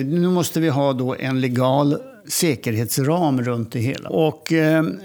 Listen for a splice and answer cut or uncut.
cut